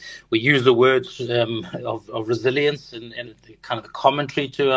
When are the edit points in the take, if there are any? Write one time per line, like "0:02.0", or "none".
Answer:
0:03.3